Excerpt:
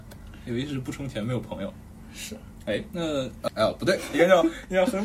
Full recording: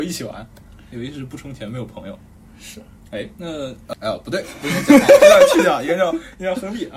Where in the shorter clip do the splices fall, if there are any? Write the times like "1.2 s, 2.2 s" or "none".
4.1 s